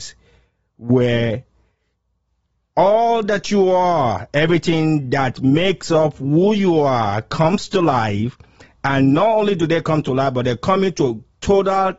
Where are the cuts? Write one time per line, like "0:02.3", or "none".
none